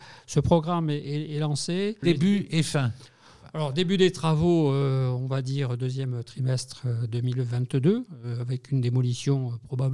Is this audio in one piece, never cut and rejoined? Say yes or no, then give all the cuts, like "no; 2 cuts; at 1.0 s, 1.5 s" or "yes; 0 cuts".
yes; 0 cuts